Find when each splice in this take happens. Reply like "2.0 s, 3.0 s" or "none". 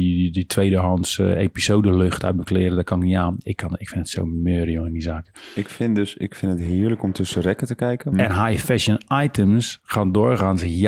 8.1 s